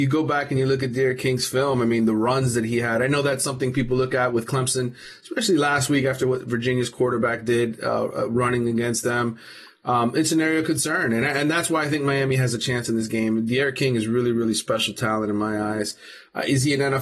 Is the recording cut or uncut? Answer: uncut